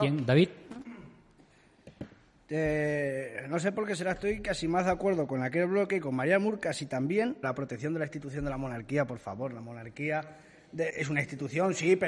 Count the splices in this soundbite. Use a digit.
2